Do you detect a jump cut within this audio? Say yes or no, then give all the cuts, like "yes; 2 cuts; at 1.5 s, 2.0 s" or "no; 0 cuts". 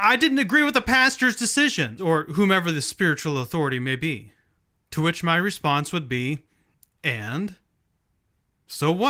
yes; 1 cut; at 2.0 s